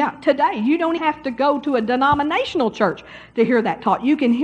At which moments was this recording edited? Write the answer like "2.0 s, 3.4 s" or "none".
1.0 s